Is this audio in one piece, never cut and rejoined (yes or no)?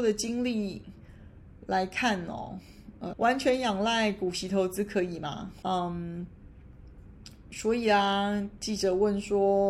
no